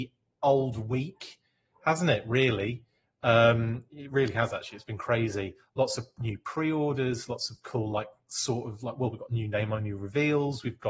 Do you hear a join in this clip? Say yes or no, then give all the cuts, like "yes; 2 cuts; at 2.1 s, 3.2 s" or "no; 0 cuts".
no; 0 cuts